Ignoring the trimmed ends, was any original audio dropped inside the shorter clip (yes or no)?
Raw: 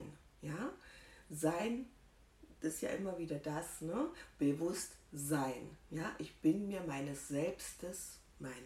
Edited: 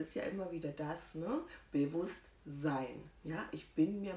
no